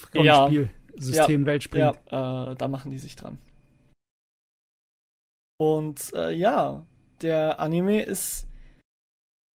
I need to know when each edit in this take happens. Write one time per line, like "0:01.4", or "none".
0:02.0

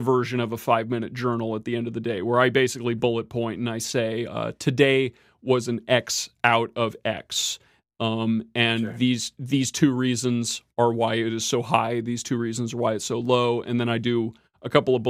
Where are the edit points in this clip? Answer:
none

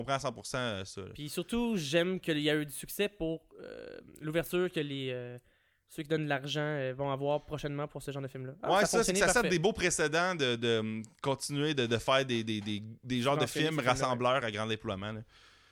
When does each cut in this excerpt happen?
none

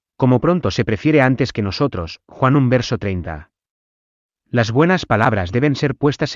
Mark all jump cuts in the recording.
none

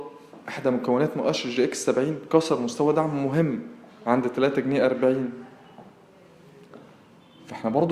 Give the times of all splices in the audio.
none

